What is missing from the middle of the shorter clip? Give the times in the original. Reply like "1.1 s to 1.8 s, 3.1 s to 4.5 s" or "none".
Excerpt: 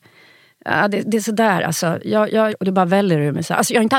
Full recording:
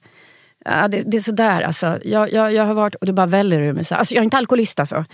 2.5 s to 2.9 s